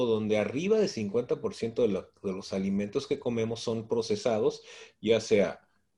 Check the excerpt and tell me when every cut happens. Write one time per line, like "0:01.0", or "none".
none

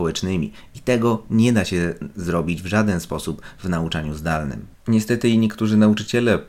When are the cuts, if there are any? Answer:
0:04.8

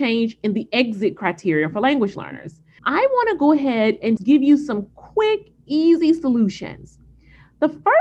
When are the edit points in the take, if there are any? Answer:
0:02.8
0:04.2

